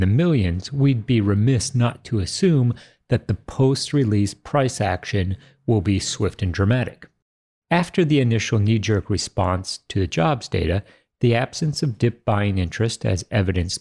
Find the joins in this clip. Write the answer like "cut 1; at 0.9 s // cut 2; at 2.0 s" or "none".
none

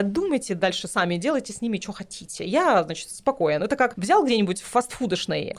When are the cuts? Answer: none

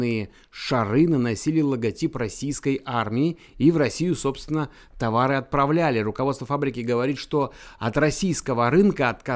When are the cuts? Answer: none

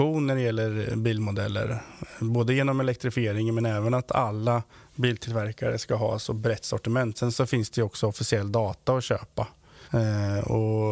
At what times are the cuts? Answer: cut 1; at 7.1 s // cut 2; at 9.8 s

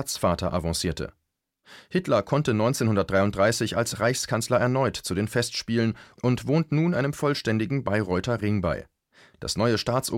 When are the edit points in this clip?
none

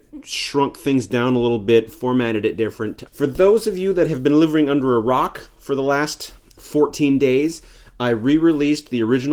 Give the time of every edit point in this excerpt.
cut 1; at 3.1 s // cut 2; at 6.6 s

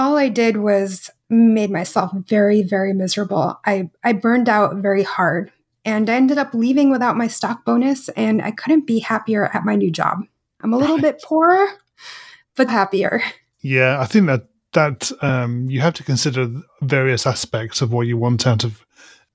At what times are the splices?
cut 1; at 12.7 s

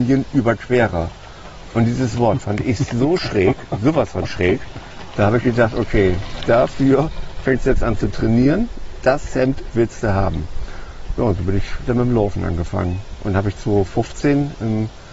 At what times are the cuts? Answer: none

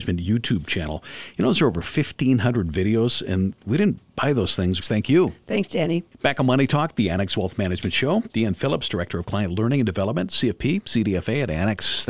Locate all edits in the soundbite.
cut 1; at 4.8 s // cut 2; at 8.3 s

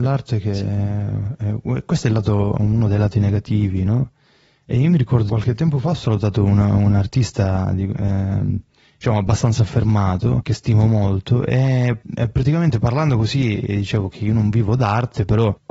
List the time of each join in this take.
cut 1; at 5.3 s

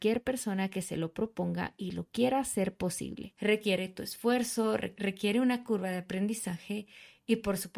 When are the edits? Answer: cut 1; at 3.4 s

